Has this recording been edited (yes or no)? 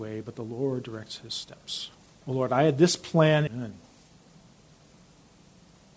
yes